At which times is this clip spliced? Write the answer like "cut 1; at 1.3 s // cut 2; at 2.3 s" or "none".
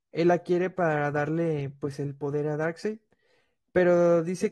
none